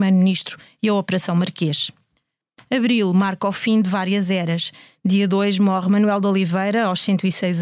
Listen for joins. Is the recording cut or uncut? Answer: uncut